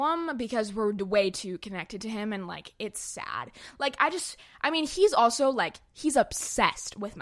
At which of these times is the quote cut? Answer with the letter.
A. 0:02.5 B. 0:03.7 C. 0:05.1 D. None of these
D